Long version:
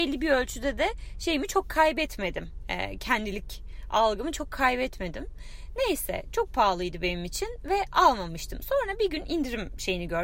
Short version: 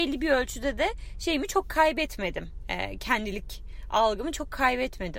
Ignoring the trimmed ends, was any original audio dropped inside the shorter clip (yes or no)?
no